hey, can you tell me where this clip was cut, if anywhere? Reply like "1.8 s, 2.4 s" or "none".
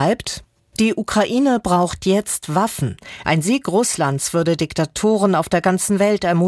3.2 s